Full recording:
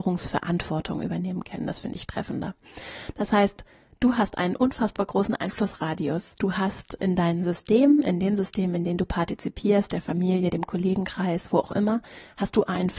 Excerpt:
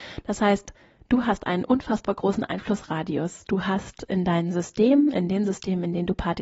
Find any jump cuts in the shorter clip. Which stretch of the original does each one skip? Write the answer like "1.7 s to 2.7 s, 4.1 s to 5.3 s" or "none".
none